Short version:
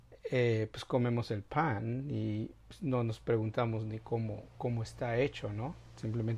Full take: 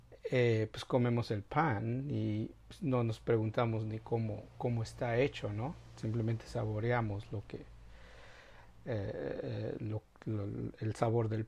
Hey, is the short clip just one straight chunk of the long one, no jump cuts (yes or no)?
yes